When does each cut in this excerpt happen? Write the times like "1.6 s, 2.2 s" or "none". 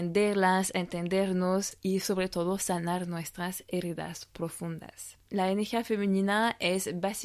5.3 s